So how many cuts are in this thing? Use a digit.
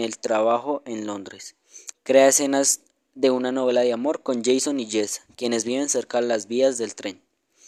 1